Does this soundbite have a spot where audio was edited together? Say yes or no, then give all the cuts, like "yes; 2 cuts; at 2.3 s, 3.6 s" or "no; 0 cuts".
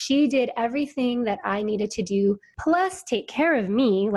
no; 0 cuts